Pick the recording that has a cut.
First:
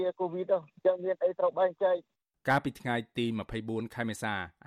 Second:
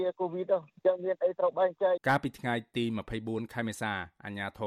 second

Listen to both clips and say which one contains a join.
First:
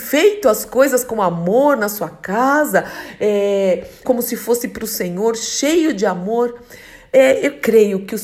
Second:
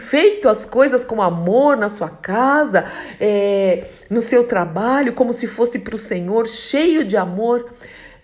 first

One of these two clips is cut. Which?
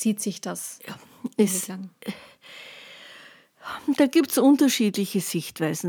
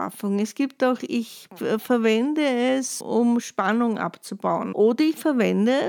second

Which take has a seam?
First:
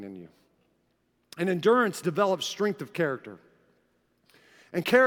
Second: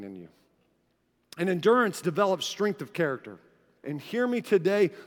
second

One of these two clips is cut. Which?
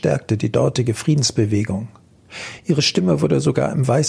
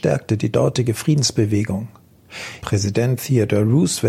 second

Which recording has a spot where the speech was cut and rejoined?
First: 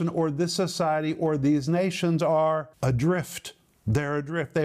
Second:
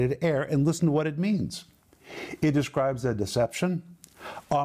first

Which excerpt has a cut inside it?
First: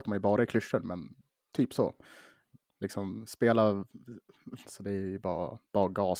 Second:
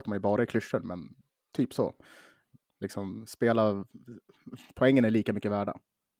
first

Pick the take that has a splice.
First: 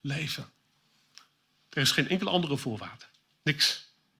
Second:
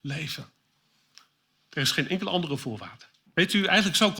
second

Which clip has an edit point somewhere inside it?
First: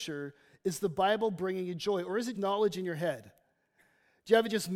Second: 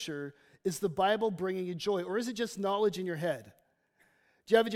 first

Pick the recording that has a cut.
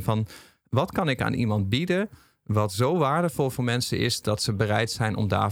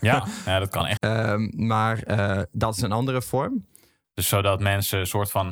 second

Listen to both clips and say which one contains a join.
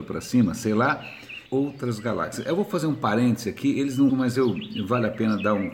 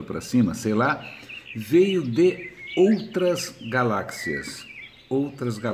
first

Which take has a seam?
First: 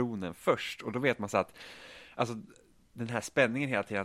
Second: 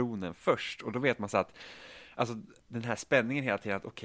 second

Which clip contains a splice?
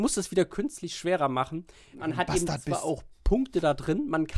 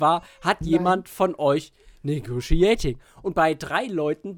first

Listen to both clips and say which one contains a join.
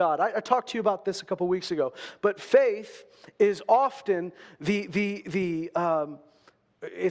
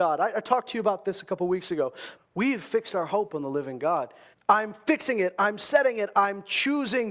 second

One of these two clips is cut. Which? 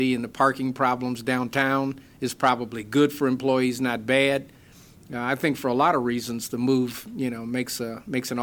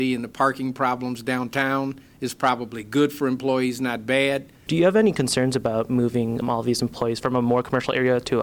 second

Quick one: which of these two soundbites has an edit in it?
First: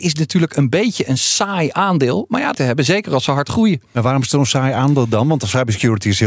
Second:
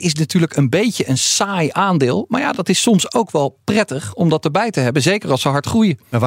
first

